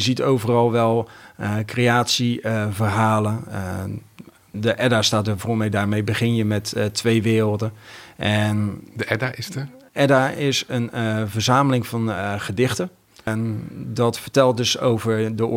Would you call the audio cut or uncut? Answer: cut